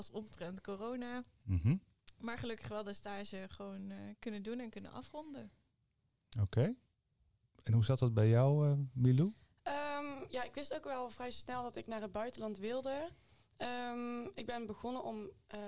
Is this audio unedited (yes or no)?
yes